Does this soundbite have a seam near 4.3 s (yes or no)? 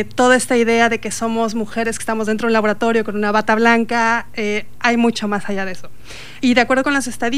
no